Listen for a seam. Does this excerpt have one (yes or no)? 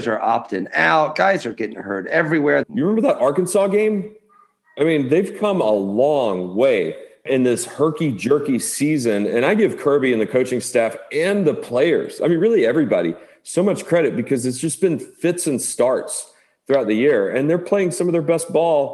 yes